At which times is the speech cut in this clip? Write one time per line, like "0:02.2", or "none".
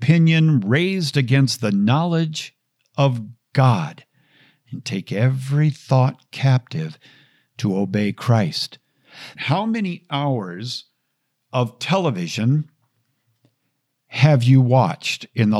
0:09.4